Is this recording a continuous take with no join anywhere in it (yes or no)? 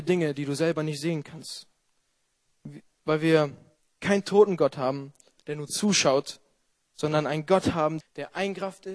no